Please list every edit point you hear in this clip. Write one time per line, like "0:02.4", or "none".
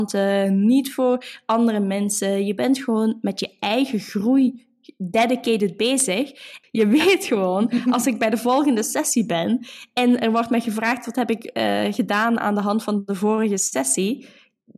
0:06.6

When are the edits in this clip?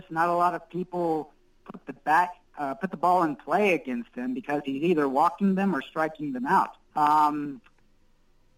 0:06.9

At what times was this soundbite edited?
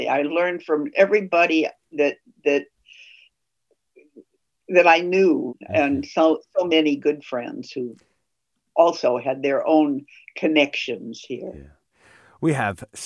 0:05.5

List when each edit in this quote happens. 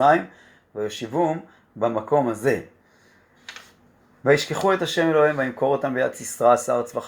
none

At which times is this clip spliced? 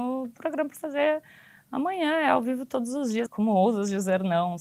0:03.3

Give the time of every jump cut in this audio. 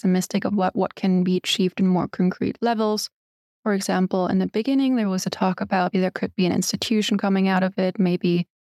0:05.9

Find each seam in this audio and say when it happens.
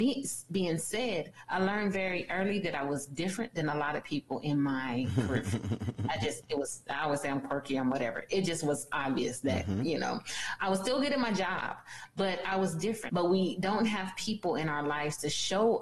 0:13.1

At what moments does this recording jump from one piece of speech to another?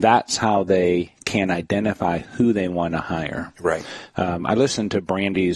none

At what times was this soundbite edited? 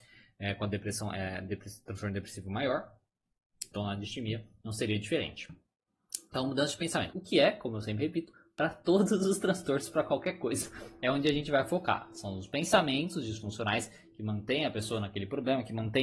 0:03.7
0:07.1

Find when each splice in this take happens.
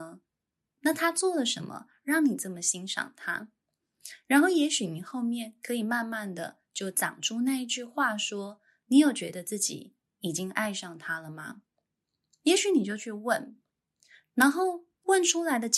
none

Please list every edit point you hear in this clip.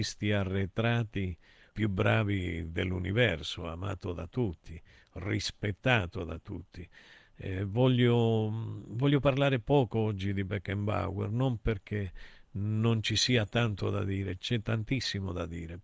0:01.7

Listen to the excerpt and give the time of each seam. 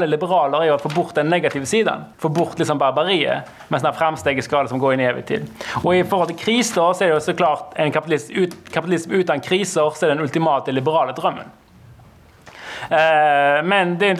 0:02.1

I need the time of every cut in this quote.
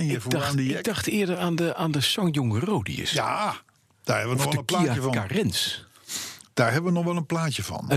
none

